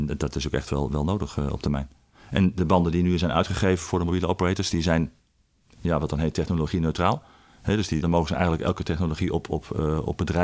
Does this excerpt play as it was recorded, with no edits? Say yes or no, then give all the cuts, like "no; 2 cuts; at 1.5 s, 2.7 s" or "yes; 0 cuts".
no; 1 cut; at 8.0 s